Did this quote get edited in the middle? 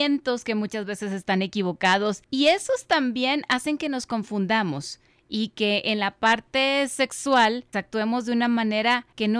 yes; 1 cut; at 7.7 s

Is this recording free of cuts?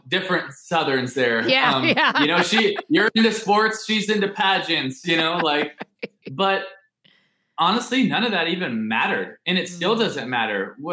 no; 1 cut; at 5.0 s

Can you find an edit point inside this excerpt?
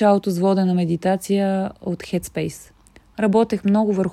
yes; 1 cut; at 3.1 s

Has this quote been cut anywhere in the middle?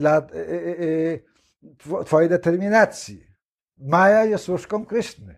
no; 0 cuts

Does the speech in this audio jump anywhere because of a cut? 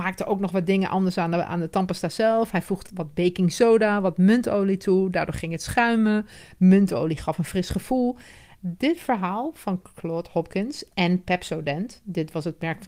yes; 2 cuts; at 2.9 s, 8.5 s

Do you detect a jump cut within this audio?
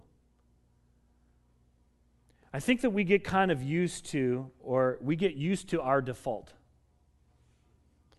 no; 0 cuts

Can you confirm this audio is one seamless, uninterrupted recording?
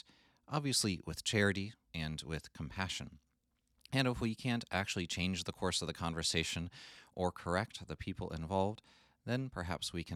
no; 1 cut; at 1.9 s

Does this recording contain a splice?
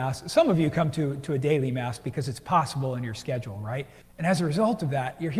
yes; 1 cut; at 4.0 s

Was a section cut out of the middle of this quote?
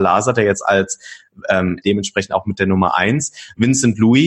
yes; 1 cut; at 1.8 s

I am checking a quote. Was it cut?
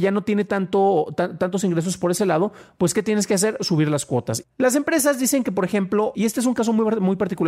yes; 2 cuts; at 4.4 s, 6.1 s

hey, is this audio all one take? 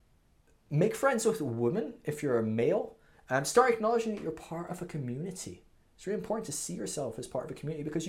no; 1 cut; at 3.1 s

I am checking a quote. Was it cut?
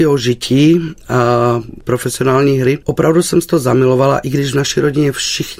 yes; 1 cut; at 2.8 s

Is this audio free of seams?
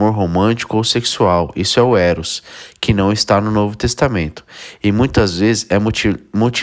yes; 0 cuts

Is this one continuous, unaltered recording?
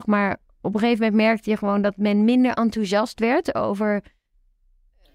yes; 0 cuts

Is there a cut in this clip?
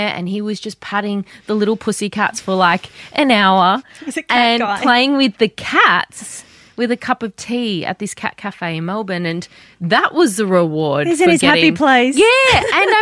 no; 0 cuts

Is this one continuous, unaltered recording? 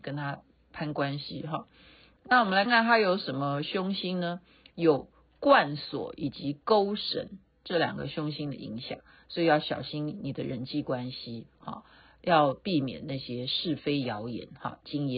no; 1 cut; at 2.7 s

